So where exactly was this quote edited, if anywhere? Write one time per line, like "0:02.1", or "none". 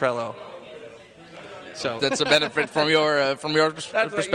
0:02.0

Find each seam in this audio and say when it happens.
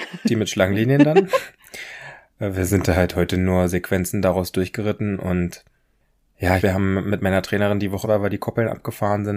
0:06.6
0:08.0

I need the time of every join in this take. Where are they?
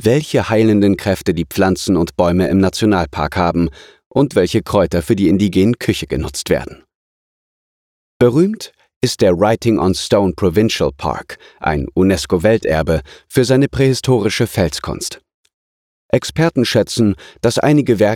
none

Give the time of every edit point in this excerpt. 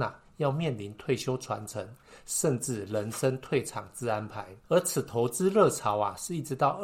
0:04.6

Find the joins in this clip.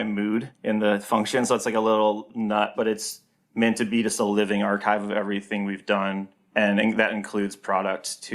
0:02.7

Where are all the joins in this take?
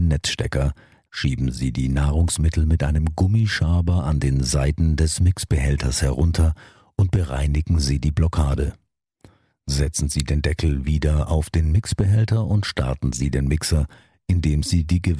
0:01.1

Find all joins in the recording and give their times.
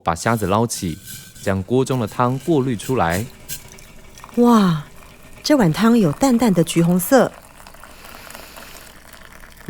none

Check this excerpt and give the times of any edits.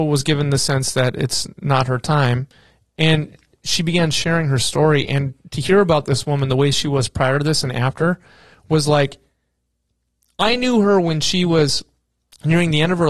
none

